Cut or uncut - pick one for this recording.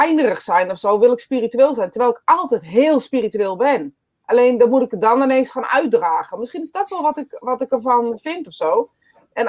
uncut